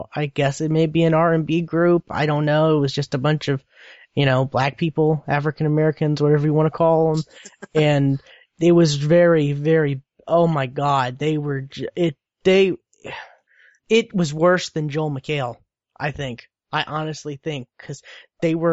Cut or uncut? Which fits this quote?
uncut